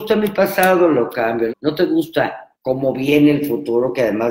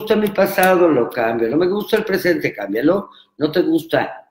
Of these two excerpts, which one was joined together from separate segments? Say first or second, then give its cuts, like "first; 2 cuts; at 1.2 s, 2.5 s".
first; 2 cuts; at 1.5 s, 2.5 s